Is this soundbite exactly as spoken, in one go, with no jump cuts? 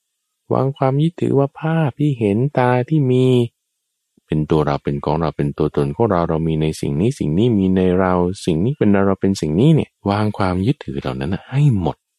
no; 1 cut; at 10.0 s

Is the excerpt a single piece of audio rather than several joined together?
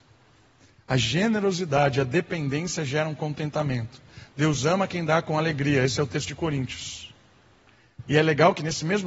yes; 0 cuts

